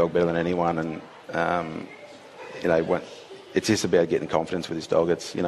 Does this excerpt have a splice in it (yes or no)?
yes